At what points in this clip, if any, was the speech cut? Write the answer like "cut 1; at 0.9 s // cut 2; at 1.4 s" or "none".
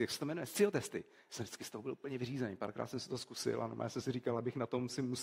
none